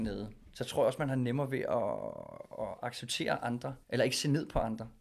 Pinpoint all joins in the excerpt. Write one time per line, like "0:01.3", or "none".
0:03.8